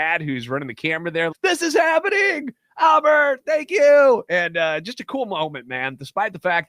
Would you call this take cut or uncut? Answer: cut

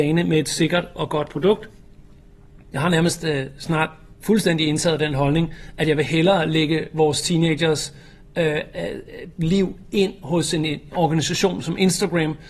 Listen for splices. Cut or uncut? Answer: uncut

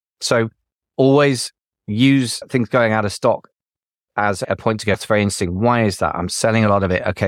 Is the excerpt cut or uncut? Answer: uncut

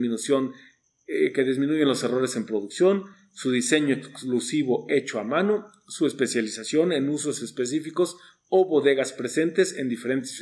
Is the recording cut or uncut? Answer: uncut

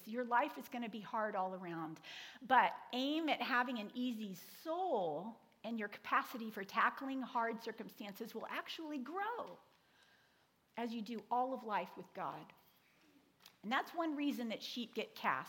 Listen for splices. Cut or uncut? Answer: uncut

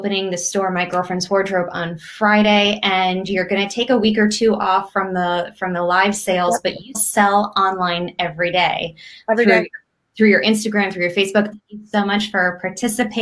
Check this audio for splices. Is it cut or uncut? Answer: cut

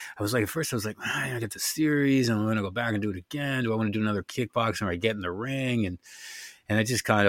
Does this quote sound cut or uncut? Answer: uncut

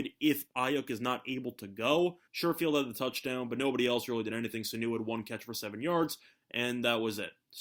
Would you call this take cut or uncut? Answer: cut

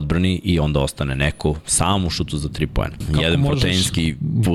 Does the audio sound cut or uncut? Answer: cut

